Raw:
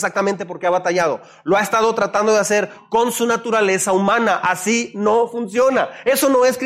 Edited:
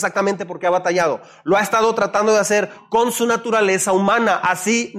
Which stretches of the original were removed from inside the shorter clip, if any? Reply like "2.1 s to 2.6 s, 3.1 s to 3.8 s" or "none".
none